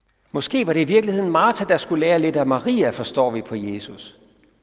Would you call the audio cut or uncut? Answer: uncut